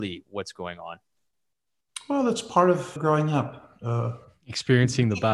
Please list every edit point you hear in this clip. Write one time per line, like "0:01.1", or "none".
0:03.0